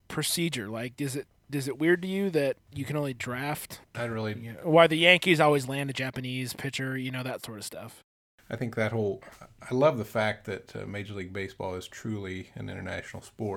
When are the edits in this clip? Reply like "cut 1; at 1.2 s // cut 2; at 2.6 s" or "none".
cut 1; at 3.9 s